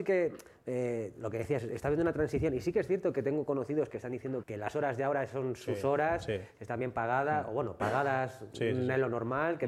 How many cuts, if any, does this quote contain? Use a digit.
1